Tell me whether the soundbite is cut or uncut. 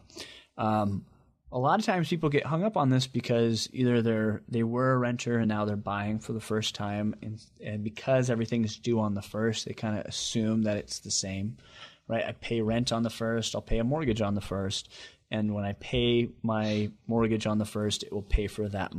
uncut